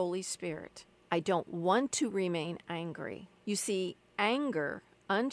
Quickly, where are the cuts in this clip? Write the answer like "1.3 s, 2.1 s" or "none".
1.0 s, 3.4 s